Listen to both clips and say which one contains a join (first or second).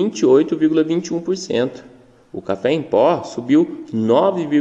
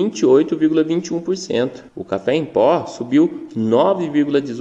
second